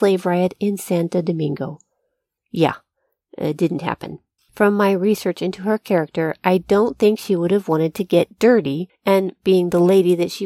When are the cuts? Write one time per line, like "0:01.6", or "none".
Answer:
0:02.4
0:04.4